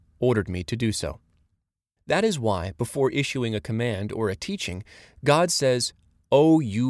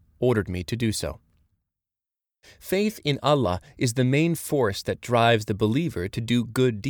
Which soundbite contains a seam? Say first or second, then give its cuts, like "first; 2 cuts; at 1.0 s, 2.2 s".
first; 1 cut; at 2.0 s